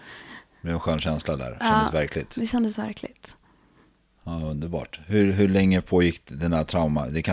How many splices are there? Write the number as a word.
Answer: zero